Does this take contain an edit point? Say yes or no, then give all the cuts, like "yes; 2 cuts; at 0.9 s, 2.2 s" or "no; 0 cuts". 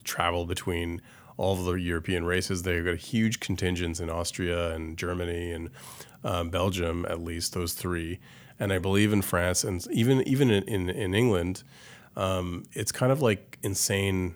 no; 0 cuts